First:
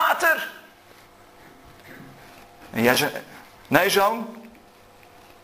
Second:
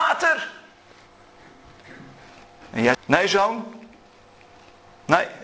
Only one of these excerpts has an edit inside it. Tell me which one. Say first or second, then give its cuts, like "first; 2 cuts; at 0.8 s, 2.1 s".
second; 1 cut; at 2.9 s